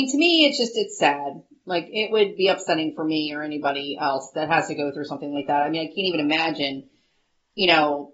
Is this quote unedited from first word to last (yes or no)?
yes